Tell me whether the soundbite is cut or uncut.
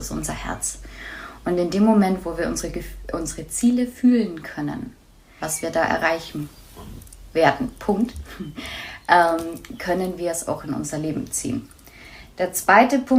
cut